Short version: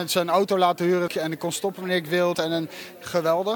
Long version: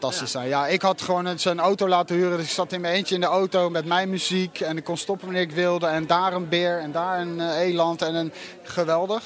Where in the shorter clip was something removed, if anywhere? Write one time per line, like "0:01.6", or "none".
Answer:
0:01.1
0:02.3